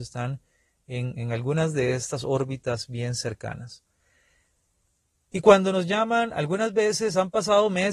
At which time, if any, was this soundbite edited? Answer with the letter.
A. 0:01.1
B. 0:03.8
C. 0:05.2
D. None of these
A